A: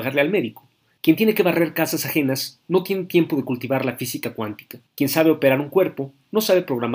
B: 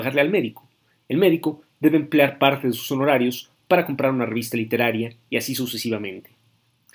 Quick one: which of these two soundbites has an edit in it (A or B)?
A